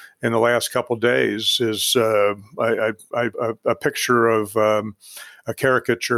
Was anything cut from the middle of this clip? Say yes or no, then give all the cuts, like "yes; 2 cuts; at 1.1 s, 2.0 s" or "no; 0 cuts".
yes; 1 cut; at 3.3 s